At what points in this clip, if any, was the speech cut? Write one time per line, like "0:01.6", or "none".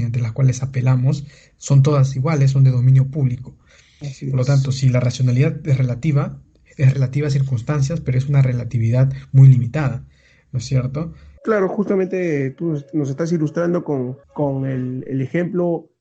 0:11.4
0:14.2